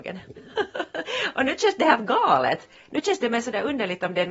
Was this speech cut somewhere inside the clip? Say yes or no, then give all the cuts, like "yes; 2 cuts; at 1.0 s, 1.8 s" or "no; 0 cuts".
no; 0 cuts